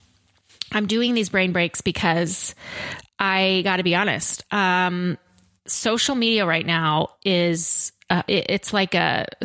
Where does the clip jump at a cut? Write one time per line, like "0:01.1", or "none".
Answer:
0:08.2